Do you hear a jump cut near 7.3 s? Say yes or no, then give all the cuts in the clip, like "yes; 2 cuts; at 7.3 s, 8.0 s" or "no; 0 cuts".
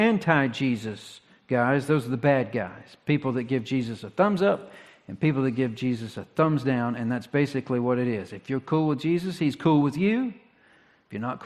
no; 0 cuts